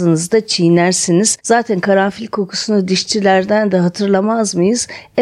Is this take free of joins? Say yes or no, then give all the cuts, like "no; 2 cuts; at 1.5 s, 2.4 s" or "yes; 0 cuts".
no; 1 cut; at 1.4 s